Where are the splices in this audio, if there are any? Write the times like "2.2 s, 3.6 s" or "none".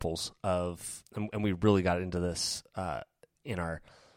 1.1 s